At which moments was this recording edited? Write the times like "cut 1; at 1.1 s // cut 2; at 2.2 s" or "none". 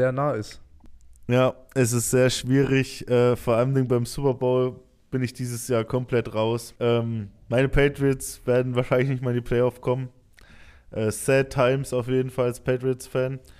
cut 1; at 6.8 s